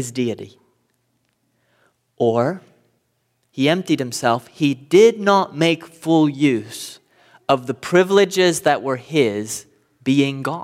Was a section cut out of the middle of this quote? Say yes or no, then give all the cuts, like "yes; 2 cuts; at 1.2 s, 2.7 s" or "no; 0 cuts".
no; 0 cuts